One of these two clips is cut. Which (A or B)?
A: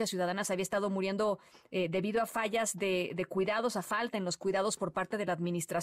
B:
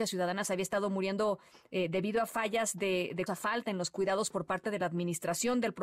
B